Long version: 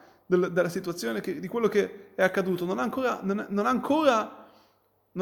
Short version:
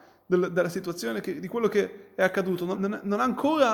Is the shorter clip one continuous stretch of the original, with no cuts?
no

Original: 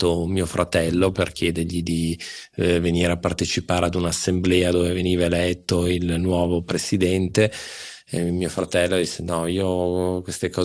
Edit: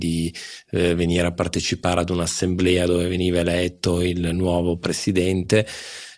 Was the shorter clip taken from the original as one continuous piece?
yes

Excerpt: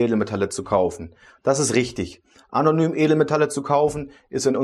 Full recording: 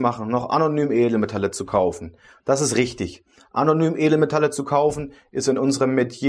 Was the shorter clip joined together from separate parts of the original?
no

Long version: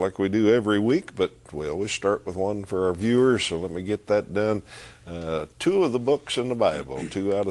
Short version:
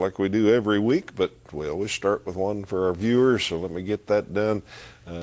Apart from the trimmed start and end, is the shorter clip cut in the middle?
no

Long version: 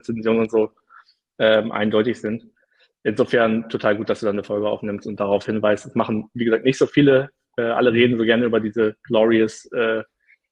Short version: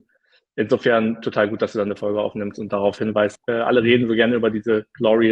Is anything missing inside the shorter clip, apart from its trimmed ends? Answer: yes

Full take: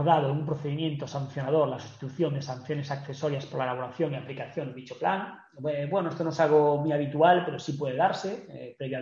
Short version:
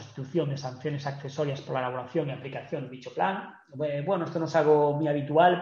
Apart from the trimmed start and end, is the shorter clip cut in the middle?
no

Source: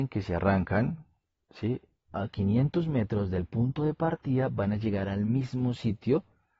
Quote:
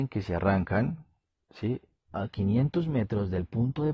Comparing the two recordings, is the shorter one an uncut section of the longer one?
yes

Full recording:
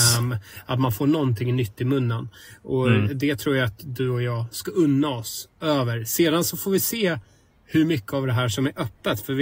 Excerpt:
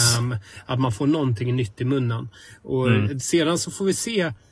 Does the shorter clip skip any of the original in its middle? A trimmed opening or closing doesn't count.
yes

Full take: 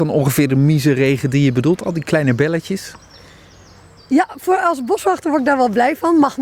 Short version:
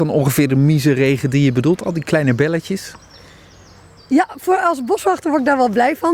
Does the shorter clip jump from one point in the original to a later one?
no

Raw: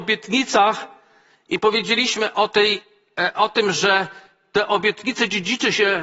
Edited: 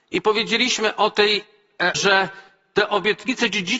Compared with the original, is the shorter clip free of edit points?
no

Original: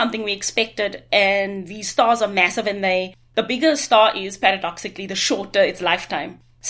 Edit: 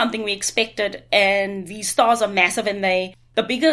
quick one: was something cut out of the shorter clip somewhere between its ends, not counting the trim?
no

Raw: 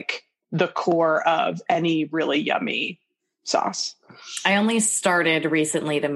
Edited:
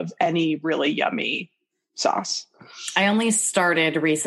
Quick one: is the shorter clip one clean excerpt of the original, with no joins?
yes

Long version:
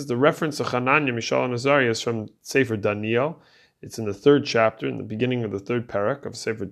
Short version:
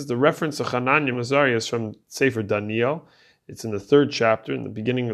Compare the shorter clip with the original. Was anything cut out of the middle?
yes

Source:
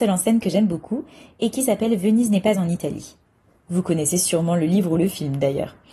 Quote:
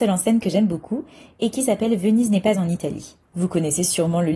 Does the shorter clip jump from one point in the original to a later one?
yes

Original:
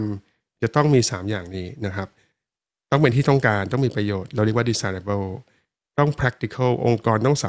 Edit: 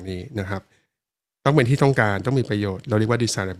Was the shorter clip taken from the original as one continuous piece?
yes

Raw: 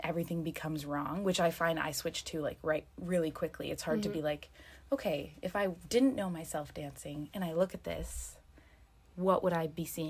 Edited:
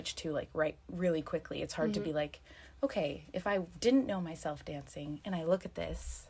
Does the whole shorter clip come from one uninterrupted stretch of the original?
yes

